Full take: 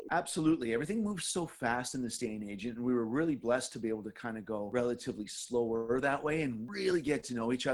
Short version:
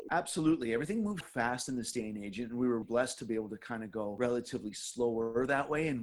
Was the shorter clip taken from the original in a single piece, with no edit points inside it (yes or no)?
no